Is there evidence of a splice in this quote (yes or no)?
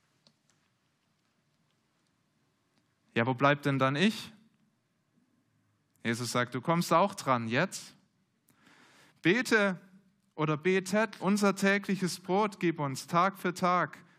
yes